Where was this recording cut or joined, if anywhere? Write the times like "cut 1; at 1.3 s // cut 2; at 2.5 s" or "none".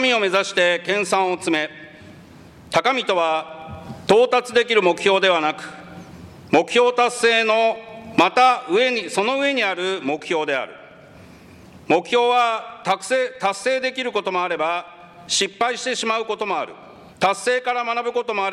cut 1; at 17.1 s